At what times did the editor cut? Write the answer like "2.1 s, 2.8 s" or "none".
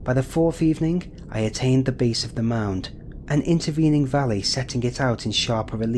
3.2 s